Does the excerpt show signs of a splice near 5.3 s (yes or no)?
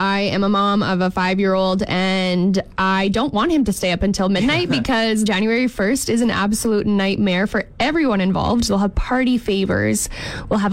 yes